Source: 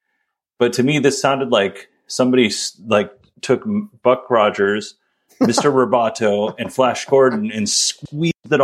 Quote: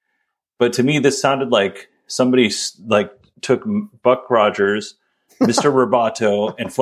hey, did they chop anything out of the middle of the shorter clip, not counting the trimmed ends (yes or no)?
no